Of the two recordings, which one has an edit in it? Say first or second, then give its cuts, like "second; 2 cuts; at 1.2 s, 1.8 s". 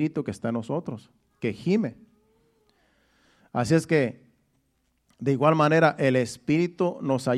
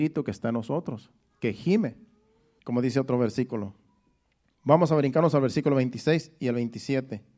second; 1 cut; at 2.6 s